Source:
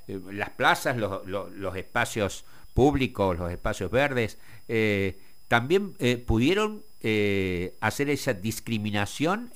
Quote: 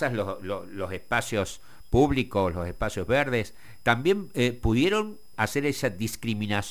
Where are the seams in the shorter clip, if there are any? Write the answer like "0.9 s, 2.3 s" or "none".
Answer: 3.8 s, 5.3 s